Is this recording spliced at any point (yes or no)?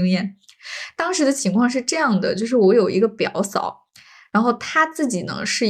no